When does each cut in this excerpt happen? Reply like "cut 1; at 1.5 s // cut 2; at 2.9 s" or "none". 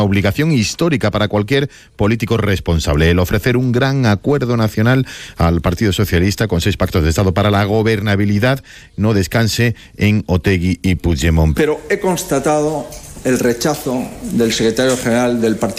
cut 1; at 11.5 s